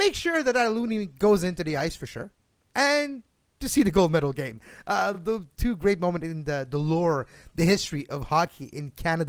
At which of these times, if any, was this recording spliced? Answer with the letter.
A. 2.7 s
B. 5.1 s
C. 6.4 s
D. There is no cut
D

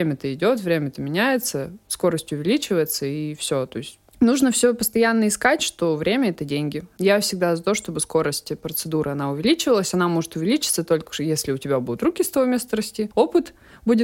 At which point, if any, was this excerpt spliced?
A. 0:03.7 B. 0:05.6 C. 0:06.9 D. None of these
B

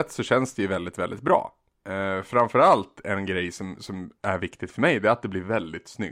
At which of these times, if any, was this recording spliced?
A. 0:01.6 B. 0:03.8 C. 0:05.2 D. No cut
D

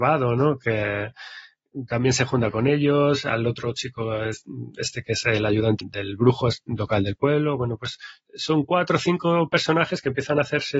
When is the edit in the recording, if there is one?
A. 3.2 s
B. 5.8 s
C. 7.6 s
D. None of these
B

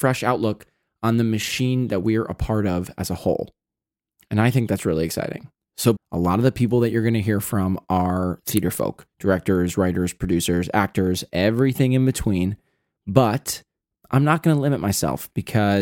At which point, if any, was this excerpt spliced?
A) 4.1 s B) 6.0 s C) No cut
B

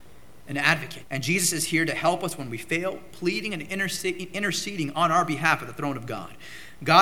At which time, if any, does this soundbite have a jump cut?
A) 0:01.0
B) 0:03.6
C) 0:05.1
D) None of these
A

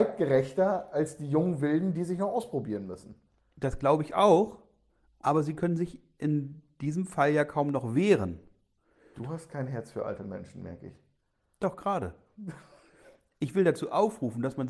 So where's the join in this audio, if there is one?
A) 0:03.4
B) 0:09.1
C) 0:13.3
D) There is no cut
B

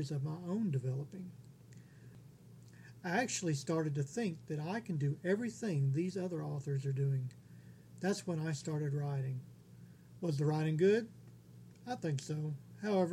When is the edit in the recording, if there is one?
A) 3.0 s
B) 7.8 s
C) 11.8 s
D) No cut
D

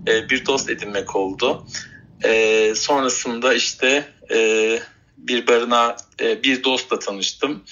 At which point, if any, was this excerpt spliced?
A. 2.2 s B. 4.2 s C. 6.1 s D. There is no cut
C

